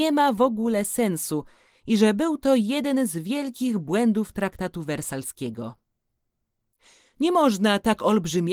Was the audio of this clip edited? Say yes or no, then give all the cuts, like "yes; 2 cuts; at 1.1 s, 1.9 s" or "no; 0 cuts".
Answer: no; 0 cuts